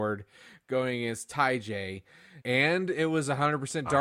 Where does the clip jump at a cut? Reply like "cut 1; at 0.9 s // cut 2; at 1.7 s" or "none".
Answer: cut 1; at 2.4 s